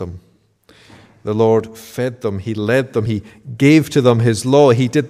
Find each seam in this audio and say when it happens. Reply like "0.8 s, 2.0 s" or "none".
none